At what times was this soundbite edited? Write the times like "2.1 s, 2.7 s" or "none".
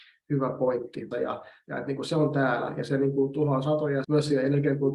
1.1 s, 4.0 s